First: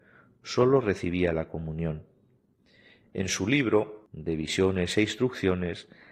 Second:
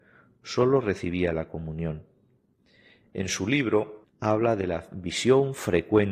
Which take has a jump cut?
second; 1 cut; at 4.0 s

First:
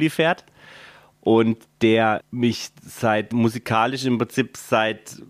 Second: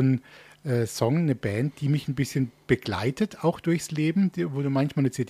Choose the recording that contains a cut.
first; 2 cuts; at 2.2 s, 3.3 s

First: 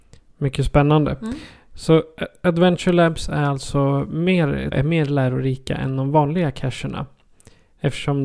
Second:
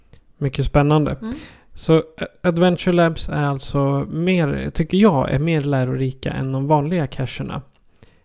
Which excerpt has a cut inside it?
first; 1 cut; at 4.7 s

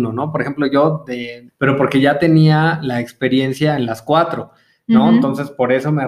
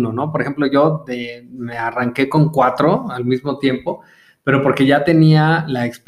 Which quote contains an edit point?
first; 1 cut; at 1.5 s

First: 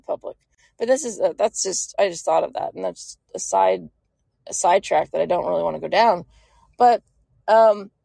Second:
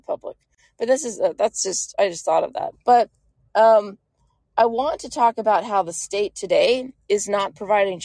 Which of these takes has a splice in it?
second; 1 cut; at 2.7 s

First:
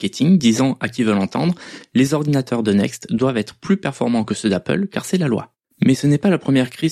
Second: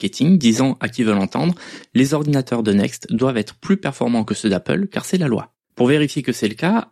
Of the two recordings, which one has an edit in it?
first; 1 cut; at 5.7 s

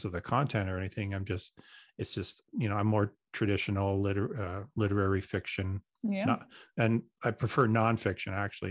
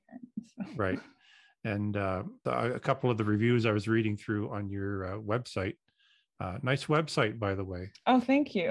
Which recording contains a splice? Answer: second; 1 cut; at 2.5 s

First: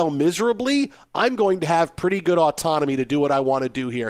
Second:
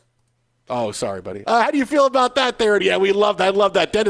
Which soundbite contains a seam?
second; 2 cuts; at 1.4 s, 2.8 s

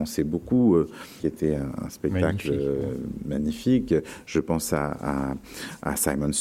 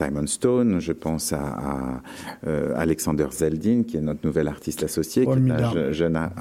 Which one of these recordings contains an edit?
first; 1 cut; at 1.2 s

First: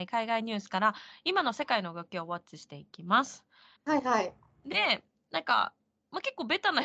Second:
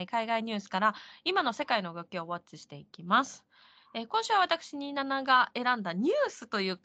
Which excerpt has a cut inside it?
first; 1 cut; at 3.8 s

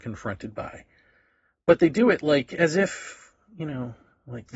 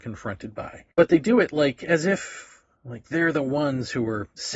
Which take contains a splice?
second; 2 cuts; at 0.9 s, 2.8 s

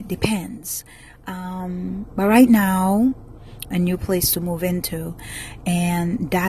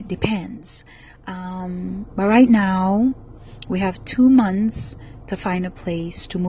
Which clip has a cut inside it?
first; 1 cut; at 3.6 s

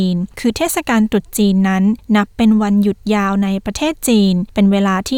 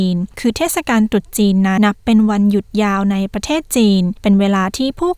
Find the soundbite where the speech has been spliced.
second; 1 cut; at 1.8 s

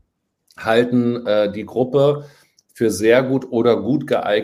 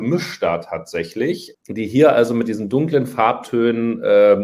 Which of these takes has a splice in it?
second; 1 cut; at 1.5 s

